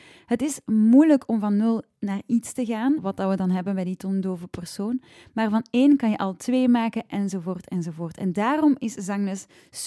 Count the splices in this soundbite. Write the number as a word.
one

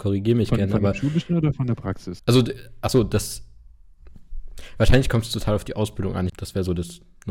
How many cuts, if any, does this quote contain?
two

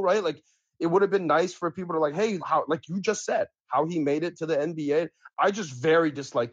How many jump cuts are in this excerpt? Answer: two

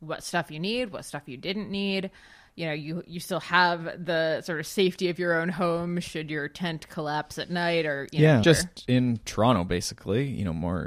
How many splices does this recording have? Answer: one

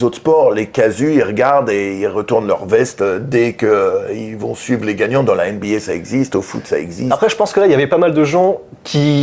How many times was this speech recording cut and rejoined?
zero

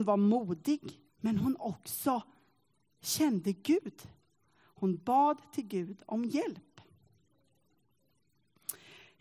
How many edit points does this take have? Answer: one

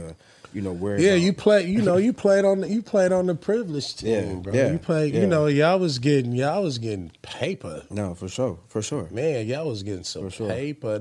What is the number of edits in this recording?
zero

